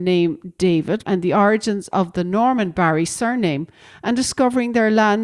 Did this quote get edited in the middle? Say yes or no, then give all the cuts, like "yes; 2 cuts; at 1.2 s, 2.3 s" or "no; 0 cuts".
yes; 1 cut; at 1.0 s